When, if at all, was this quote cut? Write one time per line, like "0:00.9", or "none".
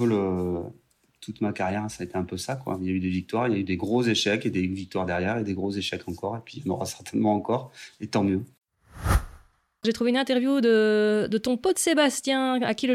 none